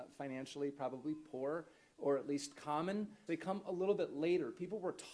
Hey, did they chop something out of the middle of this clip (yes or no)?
yes